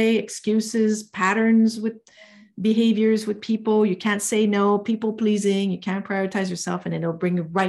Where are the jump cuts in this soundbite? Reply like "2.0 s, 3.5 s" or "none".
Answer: none